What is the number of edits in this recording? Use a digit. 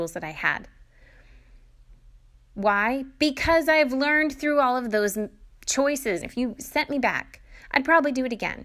2